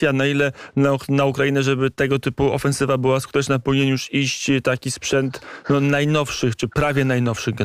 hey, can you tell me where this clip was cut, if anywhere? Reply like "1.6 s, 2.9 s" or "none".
none